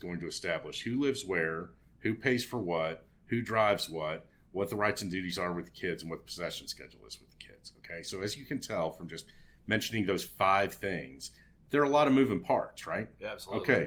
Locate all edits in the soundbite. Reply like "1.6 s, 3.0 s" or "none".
none

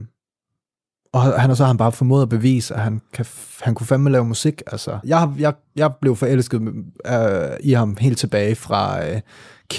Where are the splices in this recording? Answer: 5.0 s

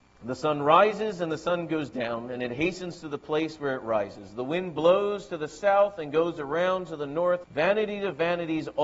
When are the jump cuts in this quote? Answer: 7.4 s

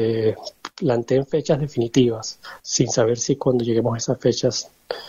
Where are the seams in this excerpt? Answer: 2.6 s

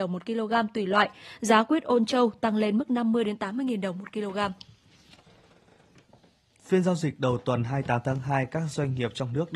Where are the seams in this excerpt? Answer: none

